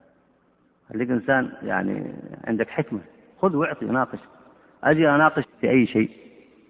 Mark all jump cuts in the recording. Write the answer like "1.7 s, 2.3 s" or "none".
5.4 s